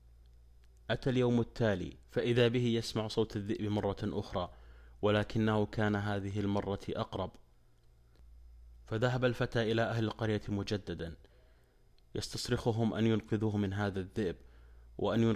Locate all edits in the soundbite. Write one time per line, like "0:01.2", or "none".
0:02.0